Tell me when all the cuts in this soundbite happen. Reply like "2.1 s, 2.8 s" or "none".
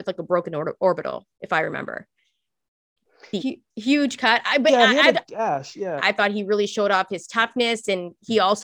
3.4 s, 6.0 s